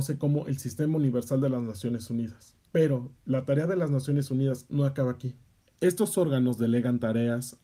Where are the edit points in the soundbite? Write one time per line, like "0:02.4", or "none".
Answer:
0:02.7
0:05.6

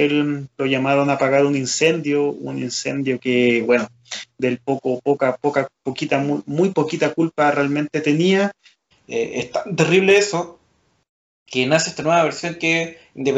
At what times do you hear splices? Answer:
0:08.9

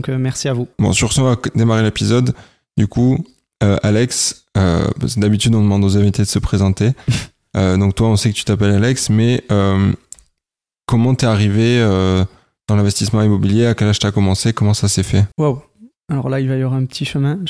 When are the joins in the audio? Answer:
0:15.3

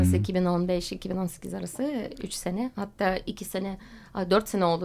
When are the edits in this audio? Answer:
none

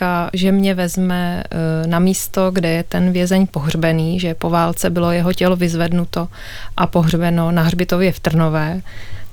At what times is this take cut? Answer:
none

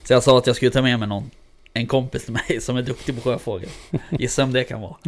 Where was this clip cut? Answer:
none

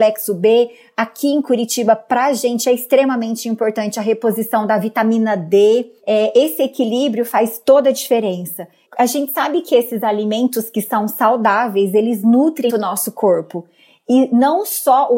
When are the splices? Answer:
0:08.9
0:12.7

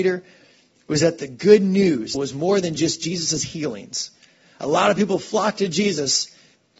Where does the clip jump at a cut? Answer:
0:02.1

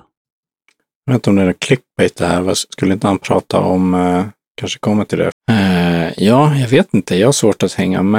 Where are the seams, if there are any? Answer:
0:05.3

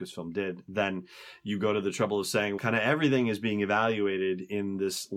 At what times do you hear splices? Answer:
0:02.6

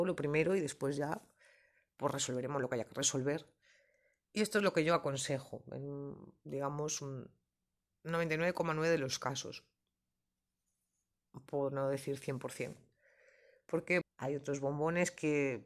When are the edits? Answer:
0:14.0

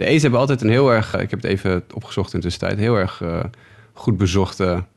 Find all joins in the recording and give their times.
0:01.1

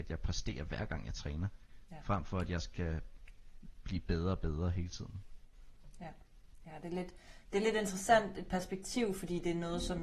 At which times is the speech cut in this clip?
0:01.9

